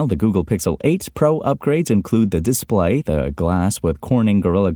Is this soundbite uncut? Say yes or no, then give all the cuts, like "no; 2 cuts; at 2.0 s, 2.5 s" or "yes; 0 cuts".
yes; 0 cuts